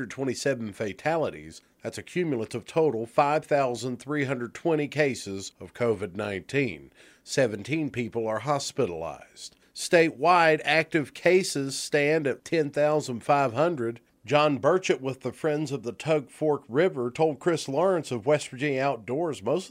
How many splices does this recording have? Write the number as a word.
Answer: one